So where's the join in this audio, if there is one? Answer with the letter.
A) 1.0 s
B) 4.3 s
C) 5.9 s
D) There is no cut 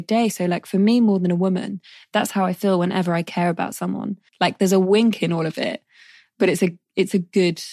B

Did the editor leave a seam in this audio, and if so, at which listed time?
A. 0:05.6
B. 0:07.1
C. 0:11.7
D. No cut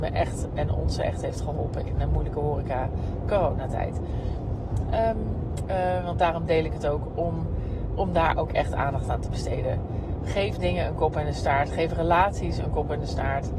A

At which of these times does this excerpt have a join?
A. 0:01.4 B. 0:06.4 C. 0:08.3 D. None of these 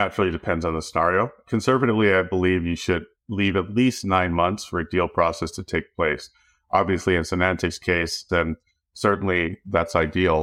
C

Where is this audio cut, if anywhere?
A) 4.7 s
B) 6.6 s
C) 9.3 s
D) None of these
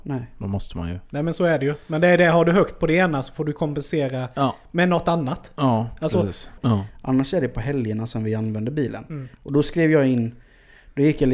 B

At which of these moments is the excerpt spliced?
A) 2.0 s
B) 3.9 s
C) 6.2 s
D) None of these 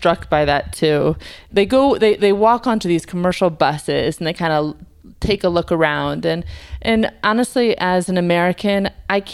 D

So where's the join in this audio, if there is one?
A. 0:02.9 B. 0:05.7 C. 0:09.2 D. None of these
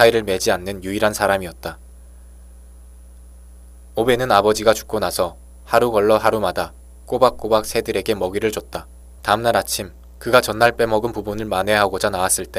C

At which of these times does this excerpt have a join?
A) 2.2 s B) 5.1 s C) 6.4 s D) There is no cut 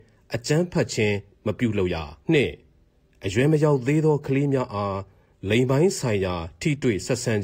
A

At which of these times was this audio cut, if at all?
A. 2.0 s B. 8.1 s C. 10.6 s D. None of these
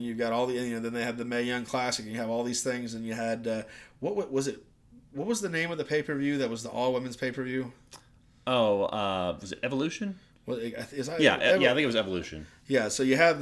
D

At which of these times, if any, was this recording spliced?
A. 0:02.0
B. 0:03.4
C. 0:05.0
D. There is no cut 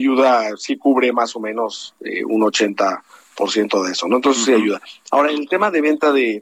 D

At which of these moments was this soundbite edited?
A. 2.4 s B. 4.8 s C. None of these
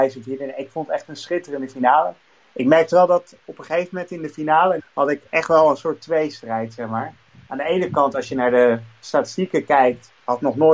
B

